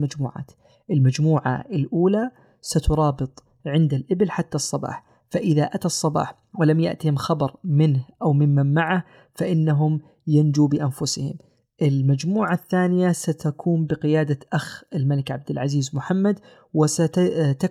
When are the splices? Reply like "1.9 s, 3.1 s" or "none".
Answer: none